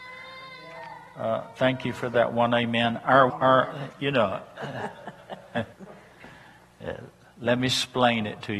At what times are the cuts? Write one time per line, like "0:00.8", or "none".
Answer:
0:03.3
0:05.7